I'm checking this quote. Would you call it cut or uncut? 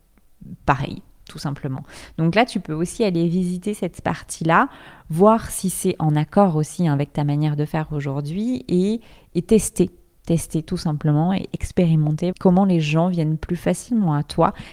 cut